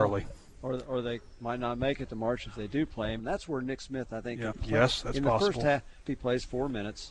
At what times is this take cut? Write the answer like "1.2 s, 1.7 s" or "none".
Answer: 3.2 s, 4.5 s, 6.1 s